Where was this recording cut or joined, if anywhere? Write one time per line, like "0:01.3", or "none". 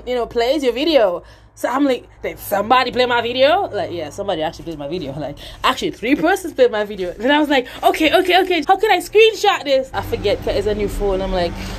0:08.6
0:09.9